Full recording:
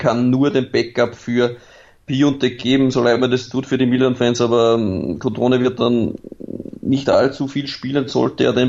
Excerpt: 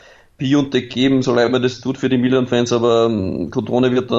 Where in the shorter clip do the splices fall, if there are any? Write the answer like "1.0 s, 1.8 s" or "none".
none